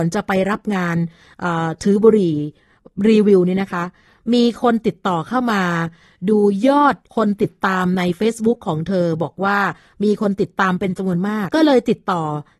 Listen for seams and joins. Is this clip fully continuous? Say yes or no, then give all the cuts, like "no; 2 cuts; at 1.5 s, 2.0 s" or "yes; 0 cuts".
no; 2 cuts; at 7.0 s, 11.5 s